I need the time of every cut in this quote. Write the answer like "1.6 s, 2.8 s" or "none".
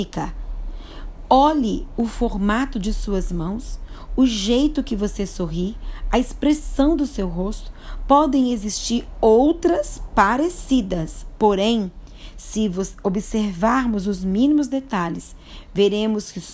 none

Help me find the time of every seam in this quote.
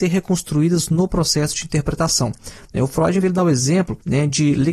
3.2 s

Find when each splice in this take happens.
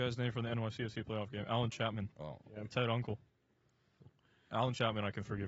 4.5 s

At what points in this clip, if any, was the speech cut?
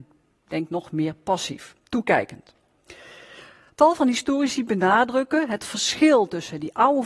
none

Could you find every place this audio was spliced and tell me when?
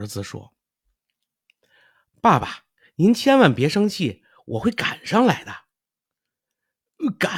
none

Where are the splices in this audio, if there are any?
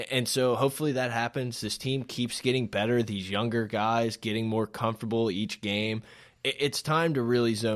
none

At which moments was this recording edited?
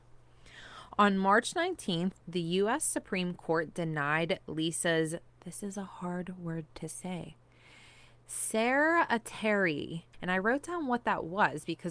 2.2 s, 10.1 s

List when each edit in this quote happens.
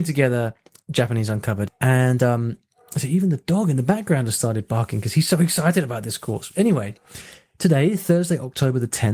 1.7 s

